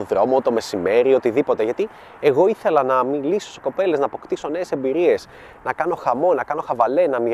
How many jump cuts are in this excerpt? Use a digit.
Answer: 0